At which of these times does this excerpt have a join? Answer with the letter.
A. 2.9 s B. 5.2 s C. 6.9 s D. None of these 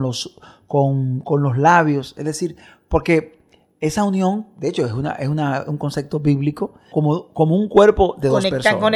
C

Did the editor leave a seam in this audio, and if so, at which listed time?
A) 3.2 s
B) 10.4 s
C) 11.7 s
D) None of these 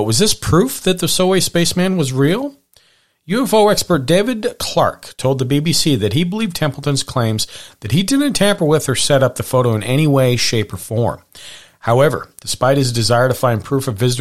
D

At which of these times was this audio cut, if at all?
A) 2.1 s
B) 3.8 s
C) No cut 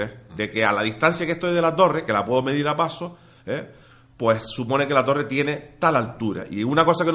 C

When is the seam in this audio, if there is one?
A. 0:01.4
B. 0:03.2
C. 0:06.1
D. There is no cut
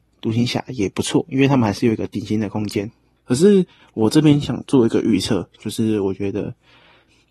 B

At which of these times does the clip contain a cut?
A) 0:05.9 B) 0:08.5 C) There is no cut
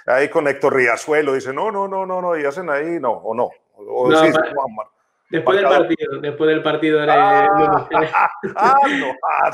C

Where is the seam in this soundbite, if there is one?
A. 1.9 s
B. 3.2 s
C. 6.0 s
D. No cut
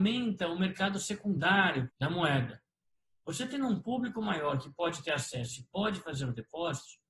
A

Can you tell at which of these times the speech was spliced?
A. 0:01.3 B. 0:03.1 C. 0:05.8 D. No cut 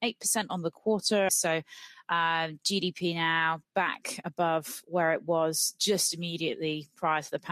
A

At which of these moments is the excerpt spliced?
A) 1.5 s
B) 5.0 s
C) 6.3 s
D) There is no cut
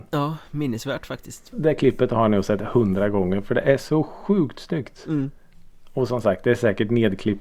A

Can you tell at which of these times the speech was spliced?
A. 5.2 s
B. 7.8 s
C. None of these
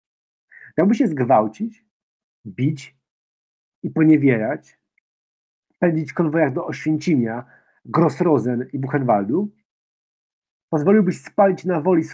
C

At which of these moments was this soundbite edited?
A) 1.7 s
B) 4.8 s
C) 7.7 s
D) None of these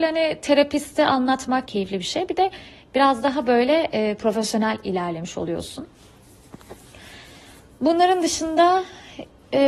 A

